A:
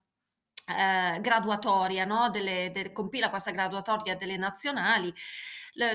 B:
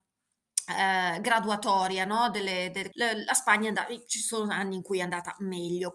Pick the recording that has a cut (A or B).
B